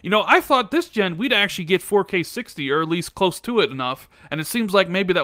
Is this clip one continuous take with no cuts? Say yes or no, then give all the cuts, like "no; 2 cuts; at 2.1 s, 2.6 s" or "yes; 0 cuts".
yes; 0 cuts